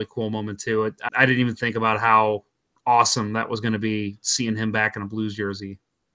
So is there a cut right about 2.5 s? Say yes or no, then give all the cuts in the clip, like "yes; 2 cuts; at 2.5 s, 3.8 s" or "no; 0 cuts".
no; 1 cut; at 1.1 s